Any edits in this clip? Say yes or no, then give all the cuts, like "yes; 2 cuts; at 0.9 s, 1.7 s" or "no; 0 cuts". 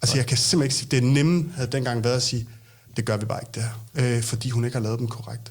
yes; 1 cut; at 3.9 s